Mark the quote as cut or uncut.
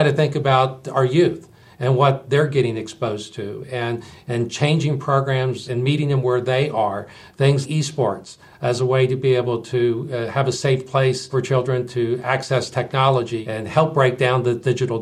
cut